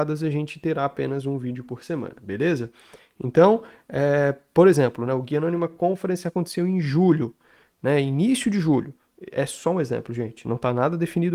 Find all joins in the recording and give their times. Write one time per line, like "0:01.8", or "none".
none